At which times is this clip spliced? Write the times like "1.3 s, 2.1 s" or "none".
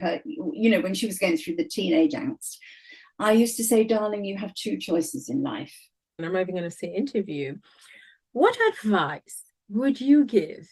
6.2 s